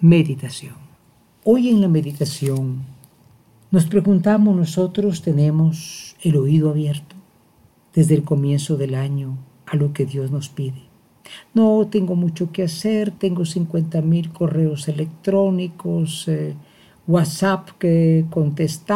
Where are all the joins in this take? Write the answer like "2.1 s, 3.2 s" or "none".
none